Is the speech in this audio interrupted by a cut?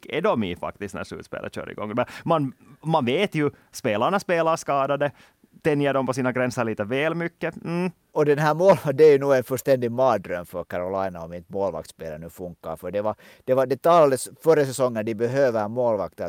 no; 0 cuts

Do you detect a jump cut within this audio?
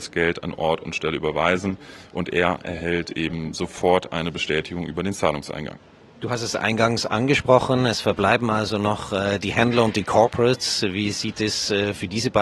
no; 0 cuts

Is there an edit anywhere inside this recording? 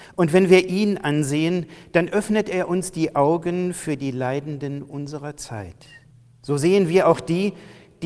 no; 0 cuts

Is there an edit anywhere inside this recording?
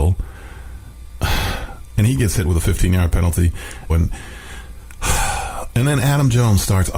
yes; 1 cut; at 3.9 s

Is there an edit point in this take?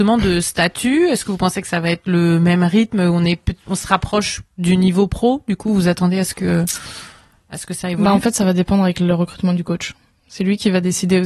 no; 0 cuts

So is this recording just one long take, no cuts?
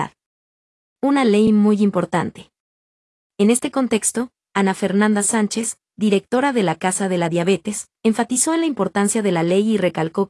yes; 0 cuts

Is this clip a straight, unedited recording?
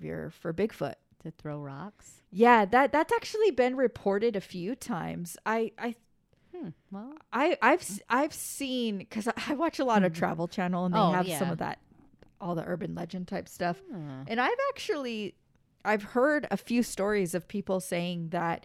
yes; 0 cuts

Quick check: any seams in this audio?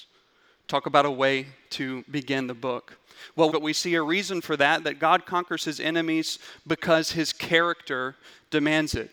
yes; 1 cut; at 3.5 s

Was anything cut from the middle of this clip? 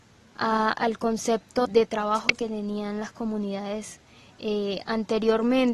yes; 1 cut; at 1.6 s

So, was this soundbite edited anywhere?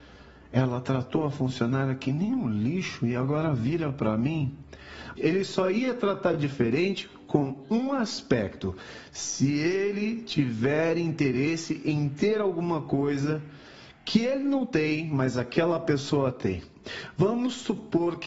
yes; 1 cut; at 5.2 s

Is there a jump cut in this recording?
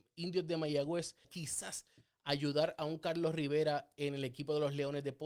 yes; 1 cut; at 1.2 s

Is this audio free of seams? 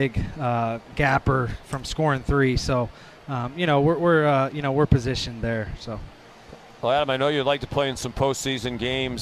yes; 0 cuts

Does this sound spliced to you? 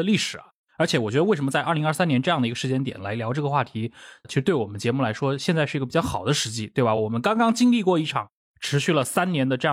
no; 0 cuts

